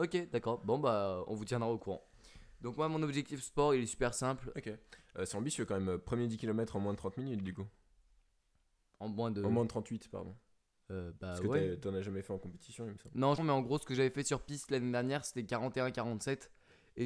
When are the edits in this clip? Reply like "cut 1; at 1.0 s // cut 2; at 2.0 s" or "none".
cut 1; at 4.5 s // cut 2; at 13.4 s